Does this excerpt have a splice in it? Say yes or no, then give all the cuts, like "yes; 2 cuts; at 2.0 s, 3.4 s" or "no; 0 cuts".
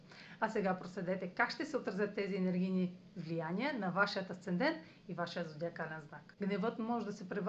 yes; 1 cut; at 6.4 s